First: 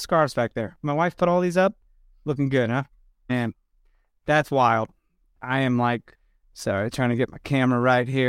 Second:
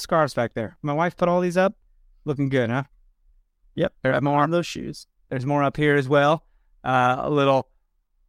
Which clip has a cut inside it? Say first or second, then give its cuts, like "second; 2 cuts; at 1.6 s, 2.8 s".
first; 1 cut; at 3.3 s